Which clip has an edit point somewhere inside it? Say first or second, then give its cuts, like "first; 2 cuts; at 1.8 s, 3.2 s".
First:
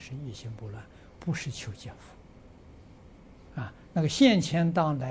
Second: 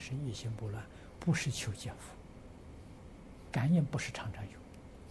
second; 1 cut; at 3.5 s